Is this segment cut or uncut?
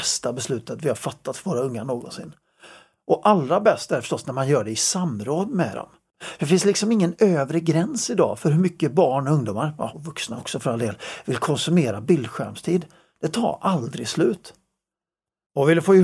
uncut